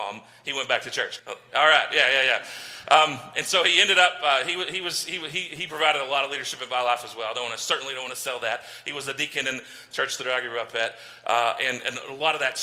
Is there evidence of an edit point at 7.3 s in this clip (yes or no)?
no